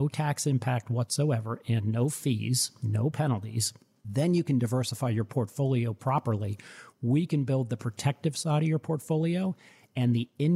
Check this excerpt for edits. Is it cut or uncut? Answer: uncut